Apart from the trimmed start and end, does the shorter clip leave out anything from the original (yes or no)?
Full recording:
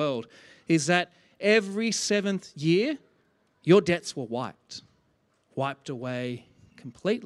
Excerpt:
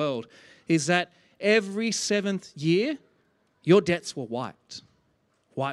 no